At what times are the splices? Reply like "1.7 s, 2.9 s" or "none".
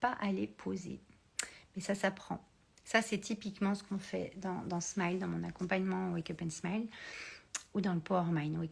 none